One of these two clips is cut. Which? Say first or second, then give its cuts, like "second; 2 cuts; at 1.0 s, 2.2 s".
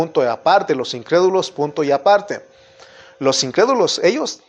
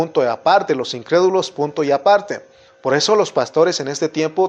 second; 1 cut; at 2.7 s